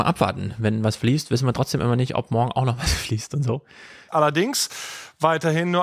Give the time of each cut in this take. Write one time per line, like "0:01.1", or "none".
0:04.1

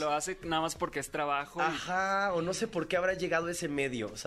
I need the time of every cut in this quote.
none

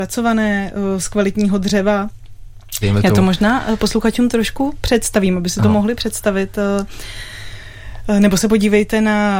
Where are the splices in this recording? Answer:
0:02.8

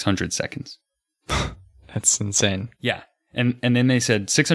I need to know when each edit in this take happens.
none

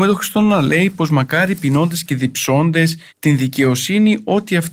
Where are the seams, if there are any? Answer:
0:03.1

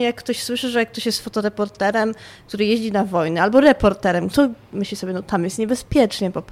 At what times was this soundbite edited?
0:04.3

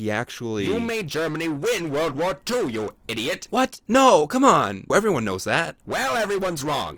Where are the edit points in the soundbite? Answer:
0:04.9

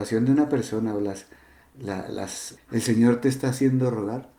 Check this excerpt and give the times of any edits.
0:02.6

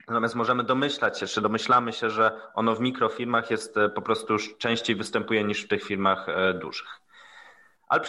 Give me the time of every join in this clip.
none

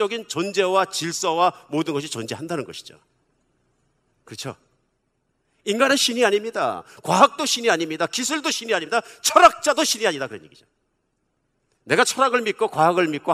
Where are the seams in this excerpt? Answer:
none

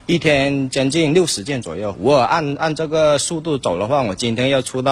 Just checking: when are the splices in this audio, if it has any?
0:01.9

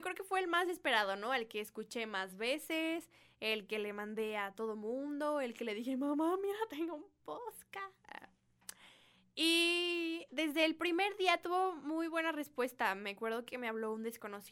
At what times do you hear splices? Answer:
none

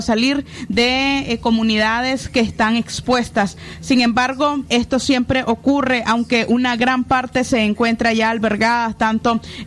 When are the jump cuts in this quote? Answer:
0:04.7

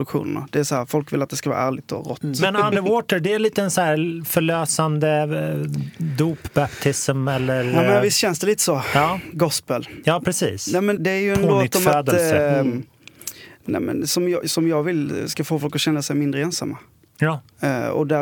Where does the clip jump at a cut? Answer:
0:11.0

